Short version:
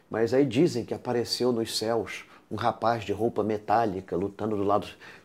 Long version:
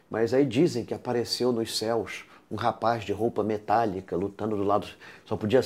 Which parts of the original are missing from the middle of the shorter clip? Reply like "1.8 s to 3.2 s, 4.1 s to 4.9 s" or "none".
none

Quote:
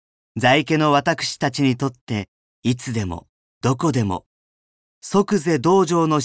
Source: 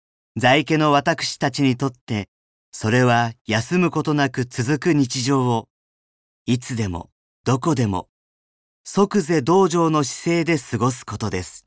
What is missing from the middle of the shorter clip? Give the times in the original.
2.5 s to 6.3 s

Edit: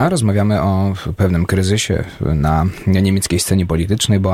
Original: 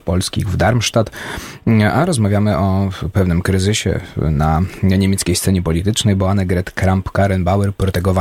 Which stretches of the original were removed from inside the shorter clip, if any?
none

